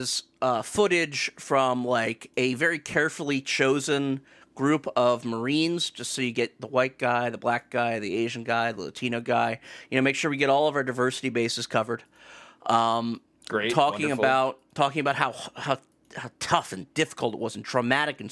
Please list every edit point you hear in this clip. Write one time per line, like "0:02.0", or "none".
none